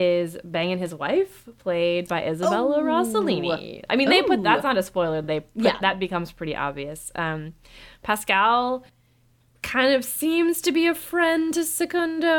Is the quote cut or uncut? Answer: uncut